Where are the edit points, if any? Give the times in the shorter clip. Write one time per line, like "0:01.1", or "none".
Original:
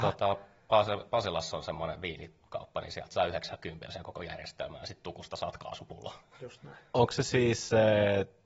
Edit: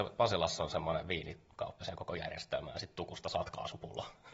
0:01.8

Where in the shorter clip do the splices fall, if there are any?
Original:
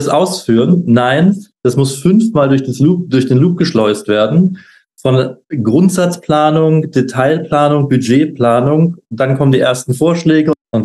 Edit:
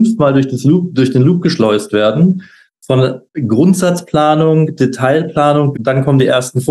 0:05.7

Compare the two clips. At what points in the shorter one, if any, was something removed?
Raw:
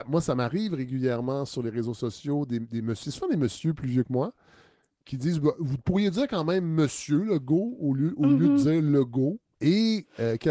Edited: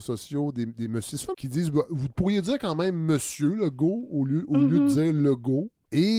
0:01.3

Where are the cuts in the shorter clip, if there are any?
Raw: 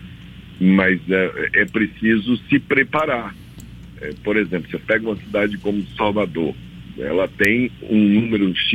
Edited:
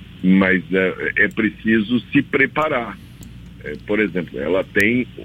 0:04.3

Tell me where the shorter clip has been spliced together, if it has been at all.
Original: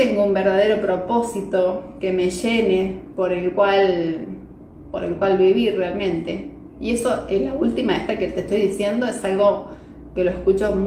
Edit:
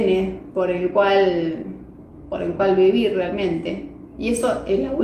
none

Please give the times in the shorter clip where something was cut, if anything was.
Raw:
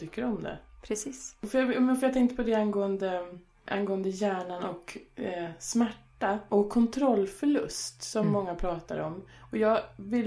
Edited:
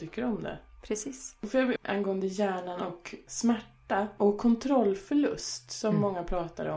0:01.8
0:03.3

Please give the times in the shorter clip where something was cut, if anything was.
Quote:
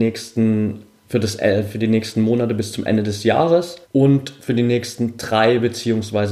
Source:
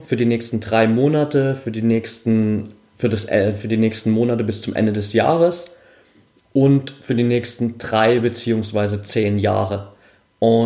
0:03.8

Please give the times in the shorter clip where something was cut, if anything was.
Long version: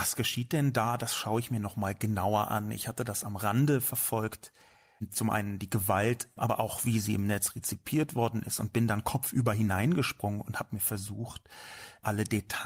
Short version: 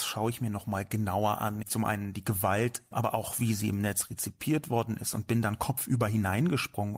0:01.6

